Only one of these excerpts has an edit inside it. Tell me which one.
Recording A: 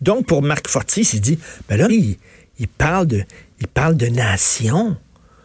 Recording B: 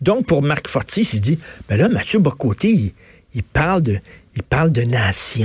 A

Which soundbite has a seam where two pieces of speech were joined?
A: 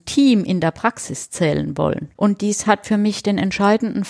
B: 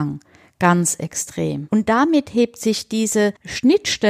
B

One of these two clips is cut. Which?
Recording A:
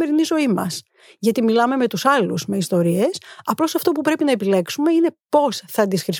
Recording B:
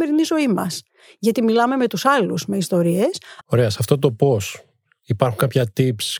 B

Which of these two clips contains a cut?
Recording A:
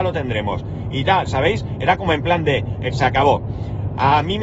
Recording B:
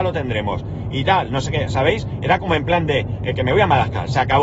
A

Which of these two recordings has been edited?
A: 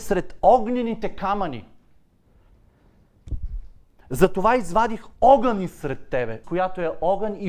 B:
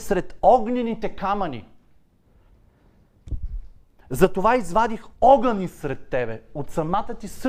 A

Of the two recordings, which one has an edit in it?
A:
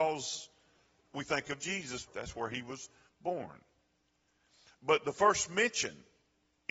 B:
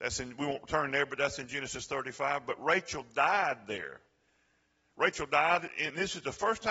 A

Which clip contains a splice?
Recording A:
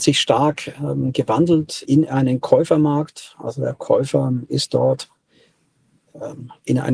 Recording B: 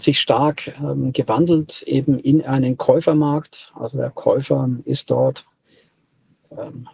A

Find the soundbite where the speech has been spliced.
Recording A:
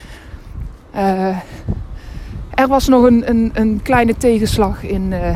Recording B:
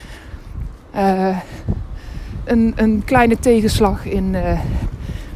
B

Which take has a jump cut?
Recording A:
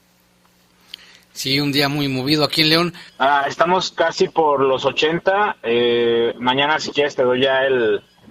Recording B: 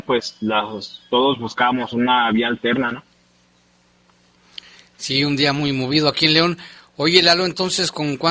A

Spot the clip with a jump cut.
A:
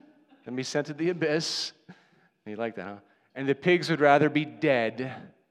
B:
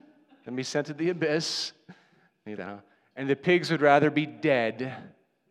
B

